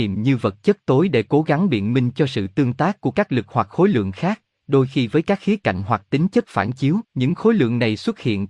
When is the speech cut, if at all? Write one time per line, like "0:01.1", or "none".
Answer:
0:07.0